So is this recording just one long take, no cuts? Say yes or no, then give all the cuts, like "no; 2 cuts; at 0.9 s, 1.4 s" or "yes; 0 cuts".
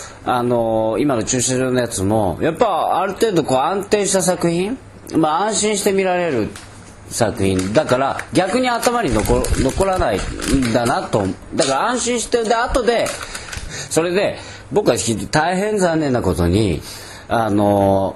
no; 1 cut; at 13.7 s